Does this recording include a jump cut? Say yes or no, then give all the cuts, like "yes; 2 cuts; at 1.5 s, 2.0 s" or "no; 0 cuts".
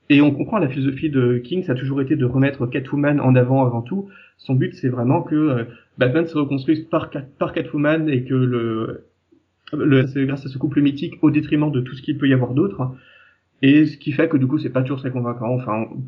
yes; 1 cut; at 10.0 s